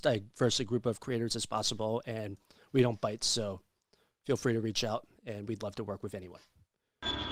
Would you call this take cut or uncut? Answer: uncut